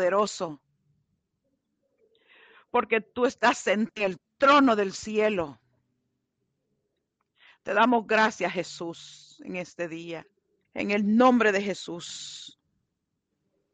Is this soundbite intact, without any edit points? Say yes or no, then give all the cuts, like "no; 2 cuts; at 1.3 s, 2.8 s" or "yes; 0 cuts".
no; 1 cut; at 10.6 s